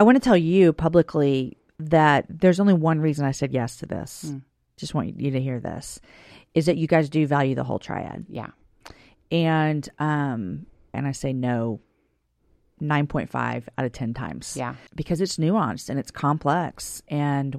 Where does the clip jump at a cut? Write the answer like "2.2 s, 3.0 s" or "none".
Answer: 10.9 s, 14.9 s